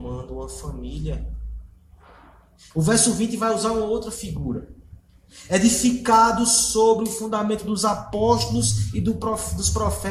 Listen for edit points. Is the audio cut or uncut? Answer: cut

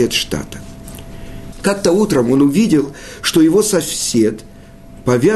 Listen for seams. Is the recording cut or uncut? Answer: cut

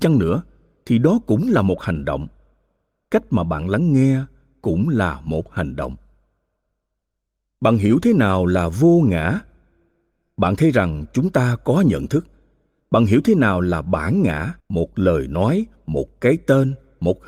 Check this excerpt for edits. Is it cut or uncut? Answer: cut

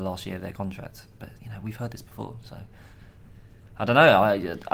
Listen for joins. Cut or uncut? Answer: uncut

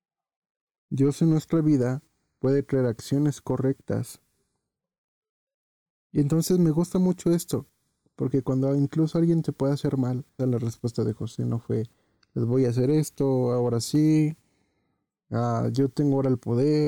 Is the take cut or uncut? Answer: cut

